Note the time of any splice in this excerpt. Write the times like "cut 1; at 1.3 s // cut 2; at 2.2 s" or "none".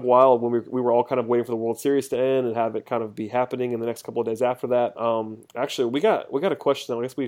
cut 1; at 4.9 s